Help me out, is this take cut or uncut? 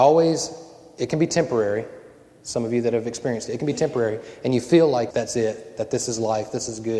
cut